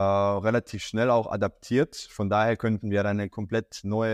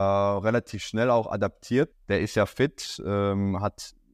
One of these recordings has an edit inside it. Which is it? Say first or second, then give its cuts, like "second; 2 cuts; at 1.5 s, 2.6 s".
second; 1 cut; at 1.9 s